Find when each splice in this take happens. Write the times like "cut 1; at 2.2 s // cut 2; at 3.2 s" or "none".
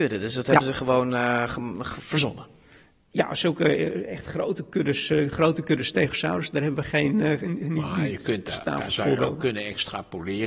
none